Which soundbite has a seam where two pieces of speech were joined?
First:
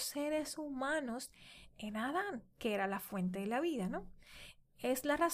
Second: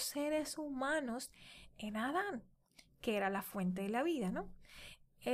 first; 1 cut; at 2.5 s

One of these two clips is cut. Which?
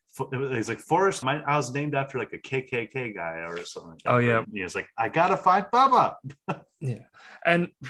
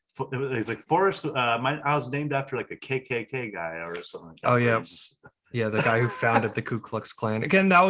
first; 2 cuts; at 1.2 s, 4.4 s

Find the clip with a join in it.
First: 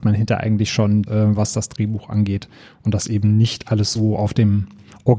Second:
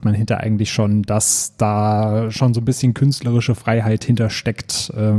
first; 1 cut; at 1.1 s

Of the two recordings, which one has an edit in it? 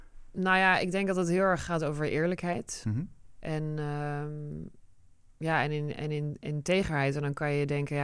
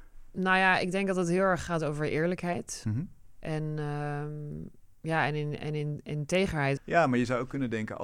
second; 2 cuts; at 5.0 s, 6.8 s

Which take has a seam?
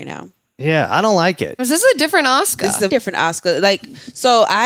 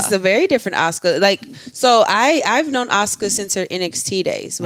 first; 2 cuts; at 1.6 s, 2.9 s

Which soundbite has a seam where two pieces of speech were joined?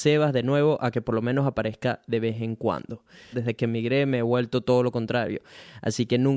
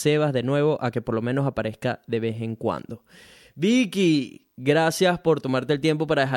first; 1 cut; at 3.3 s

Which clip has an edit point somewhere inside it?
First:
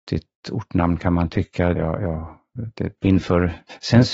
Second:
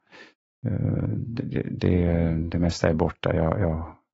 first; 2 cuts; at 1.7 s, 3.0 s

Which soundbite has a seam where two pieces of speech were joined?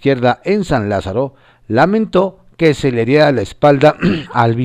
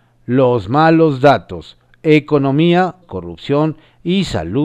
second; 1 cut; at 3.0 s

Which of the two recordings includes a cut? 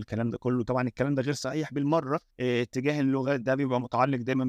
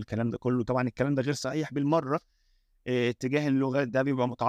first; 1 cut; at 2.3 s

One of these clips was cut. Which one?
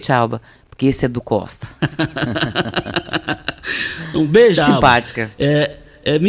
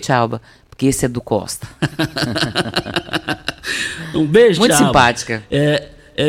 first; 1 cut; at 4.6 s

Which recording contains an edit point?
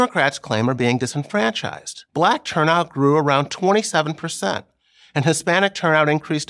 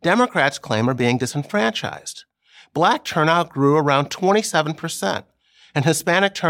first; 1 cut; at 2.1 s

